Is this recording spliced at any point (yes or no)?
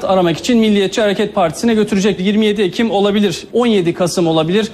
yes